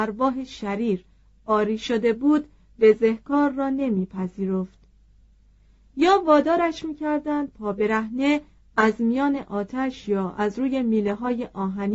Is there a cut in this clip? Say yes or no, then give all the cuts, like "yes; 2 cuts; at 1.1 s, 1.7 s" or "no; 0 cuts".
no; 0 cuts